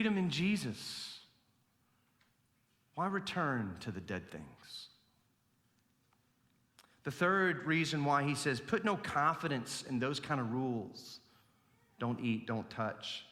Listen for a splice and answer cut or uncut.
uncut